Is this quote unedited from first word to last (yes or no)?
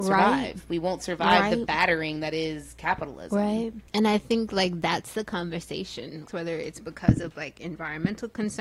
no